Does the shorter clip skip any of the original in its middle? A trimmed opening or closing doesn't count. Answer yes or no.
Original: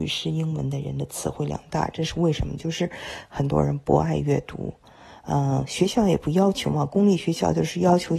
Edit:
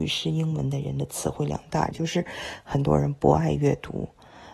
yes